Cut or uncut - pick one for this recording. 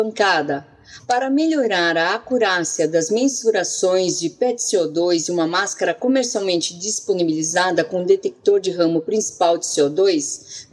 cut